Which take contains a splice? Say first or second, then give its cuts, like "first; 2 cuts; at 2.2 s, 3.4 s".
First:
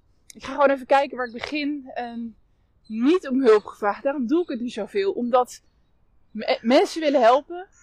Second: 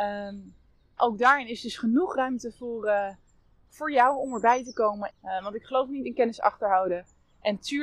second; 2 cuts; at 1.0 s, 5.1 s